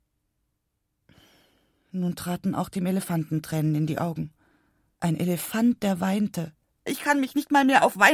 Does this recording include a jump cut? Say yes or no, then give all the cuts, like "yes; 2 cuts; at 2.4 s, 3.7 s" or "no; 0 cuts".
yes; 1 cut; at 6.9 s